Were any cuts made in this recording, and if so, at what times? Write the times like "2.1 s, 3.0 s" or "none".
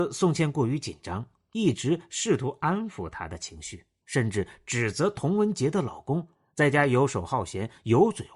4.0 s

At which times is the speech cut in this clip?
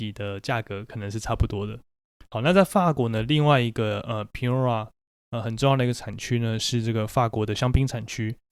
none

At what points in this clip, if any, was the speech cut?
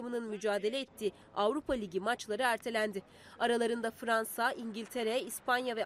none

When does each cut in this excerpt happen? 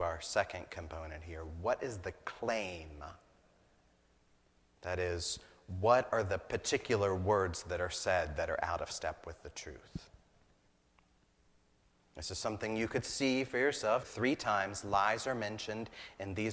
14.0 s

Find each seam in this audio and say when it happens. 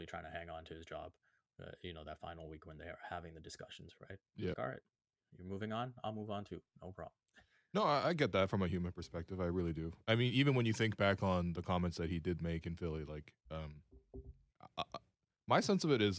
4.5 s

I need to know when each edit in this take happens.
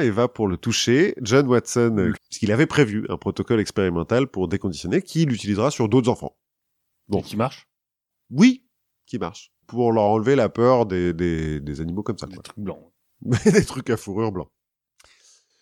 2.1 s

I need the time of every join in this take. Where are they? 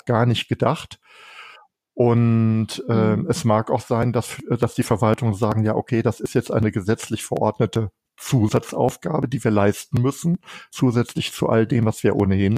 none

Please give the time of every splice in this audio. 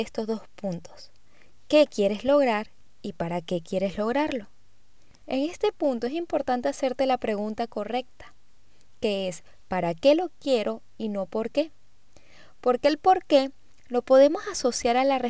5.2 s

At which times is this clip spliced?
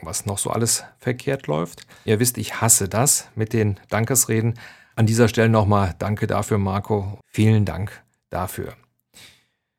2.1 s, 4.9 s, 7.2 s

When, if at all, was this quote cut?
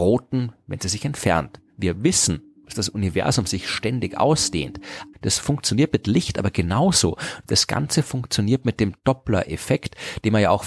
1.7 s, 5.1 s, 7.4 s

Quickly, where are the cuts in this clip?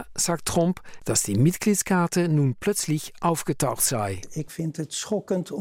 1.0 s

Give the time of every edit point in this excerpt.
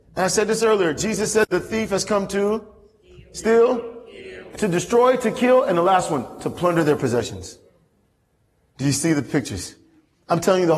4.5 s

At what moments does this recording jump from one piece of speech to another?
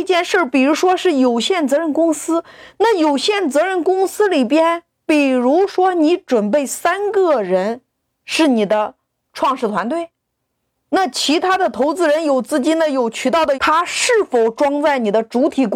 13.5 s

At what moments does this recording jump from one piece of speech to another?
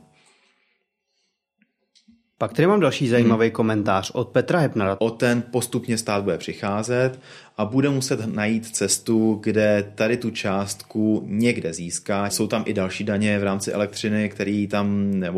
5.0 s, 12.3 s

